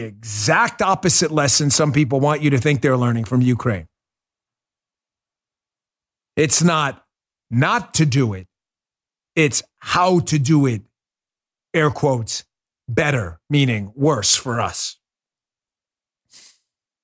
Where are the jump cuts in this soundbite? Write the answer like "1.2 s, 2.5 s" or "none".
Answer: none